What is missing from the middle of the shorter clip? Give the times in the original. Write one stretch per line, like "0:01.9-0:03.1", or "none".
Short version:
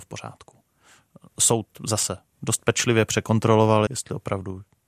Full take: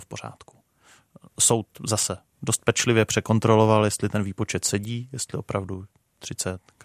0:03.9-0:05.1